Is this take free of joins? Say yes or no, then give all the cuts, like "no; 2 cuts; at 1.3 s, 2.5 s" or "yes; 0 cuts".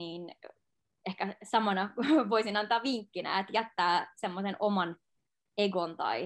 yes; 0 cuts